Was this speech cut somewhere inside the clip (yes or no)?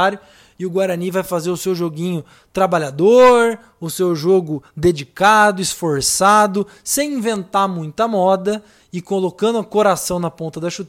no